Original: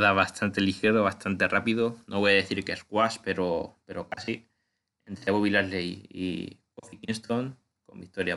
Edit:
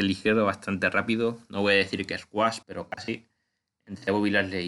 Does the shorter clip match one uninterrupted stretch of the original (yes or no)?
no